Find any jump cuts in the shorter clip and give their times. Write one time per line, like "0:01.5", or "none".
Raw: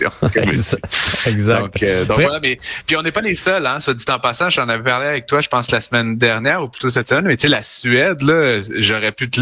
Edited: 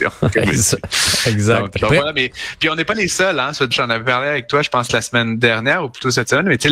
0:01.8
0:03.7